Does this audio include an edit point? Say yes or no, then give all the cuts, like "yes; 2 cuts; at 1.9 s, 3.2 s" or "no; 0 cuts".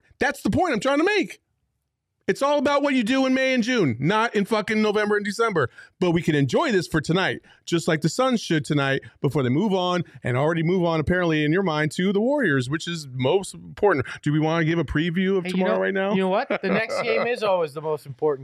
no; 0 cuts